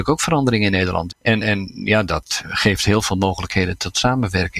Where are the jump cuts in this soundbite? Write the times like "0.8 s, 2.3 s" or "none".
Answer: 1.1 s, 2.4 s